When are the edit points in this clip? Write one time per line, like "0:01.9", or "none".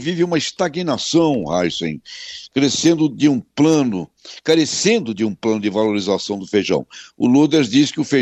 none